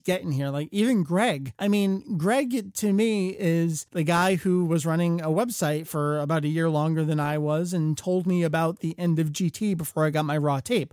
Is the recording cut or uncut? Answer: uncut